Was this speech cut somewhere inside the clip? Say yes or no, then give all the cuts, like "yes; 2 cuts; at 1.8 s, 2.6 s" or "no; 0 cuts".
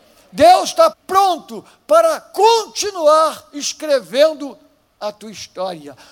yes; 1 cut; at 0.9 s